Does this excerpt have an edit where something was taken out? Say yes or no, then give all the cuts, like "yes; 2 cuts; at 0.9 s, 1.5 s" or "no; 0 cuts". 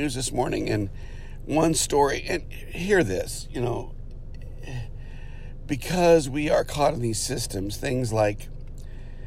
no; 0 cuts